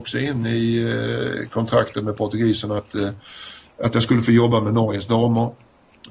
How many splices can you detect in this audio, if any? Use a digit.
0